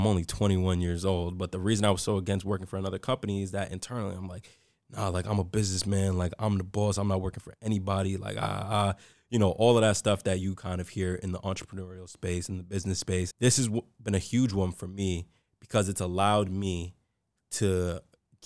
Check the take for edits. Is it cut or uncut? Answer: cut